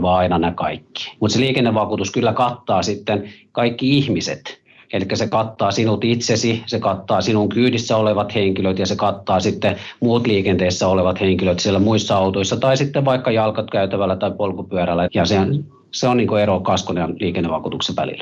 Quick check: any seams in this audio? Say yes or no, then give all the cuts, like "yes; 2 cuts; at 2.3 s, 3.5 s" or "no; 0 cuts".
yes; 2 cuts; at 1.2 s, 15.1 s